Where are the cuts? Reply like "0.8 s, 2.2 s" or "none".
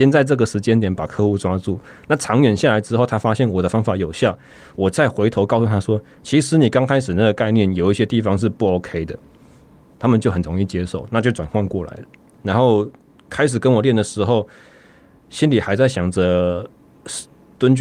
12.3 s